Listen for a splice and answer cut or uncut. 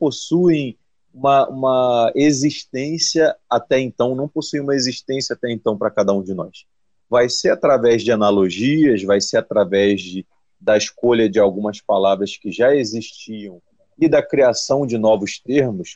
uncut